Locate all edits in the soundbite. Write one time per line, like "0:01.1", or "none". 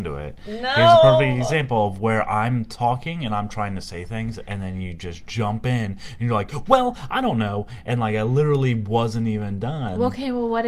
none